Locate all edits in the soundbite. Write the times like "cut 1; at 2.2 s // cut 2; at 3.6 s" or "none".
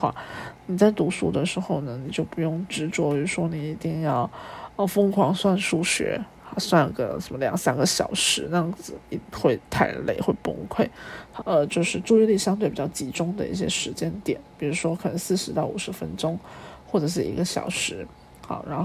cut 1; at 11.4 s